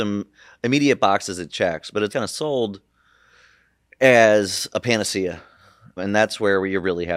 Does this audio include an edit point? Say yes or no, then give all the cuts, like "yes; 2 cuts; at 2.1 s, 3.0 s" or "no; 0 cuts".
yes; 2 cuts; at 2.1 s, 6.0 s